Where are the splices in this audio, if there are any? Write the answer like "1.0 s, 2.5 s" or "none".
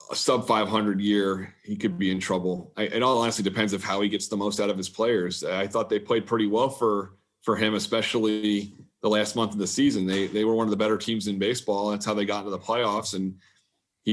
none